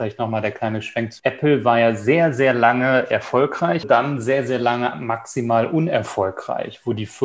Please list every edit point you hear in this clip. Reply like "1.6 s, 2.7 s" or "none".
1.2 s, 3.8 s